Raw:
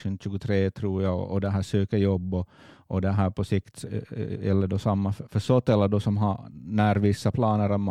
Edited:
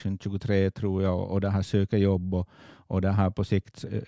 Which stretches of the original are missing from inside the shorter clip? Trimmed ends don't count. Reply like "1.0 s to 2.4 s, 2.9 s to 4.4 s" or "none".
none